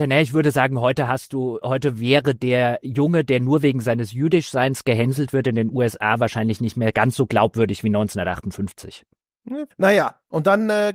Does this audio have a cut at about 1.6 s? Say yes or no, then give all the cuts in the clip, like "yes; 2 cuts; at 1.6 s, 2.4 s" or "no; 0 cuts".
yes; 2 cuts; at 1.6 s, 9.7 s